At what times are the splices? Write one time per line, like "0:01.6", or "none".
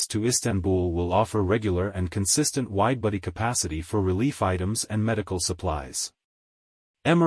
none